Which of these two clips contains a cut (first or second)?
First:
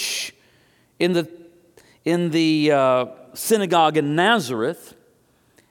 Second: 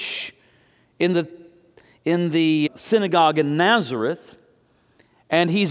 second